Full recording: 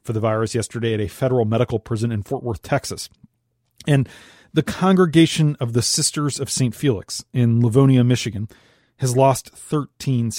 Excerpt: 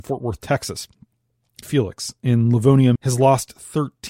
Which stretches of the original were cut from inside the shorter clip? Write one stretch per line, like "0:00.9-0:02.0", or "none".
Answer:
0:03.8-0:06.7
0:08.1-0:08.9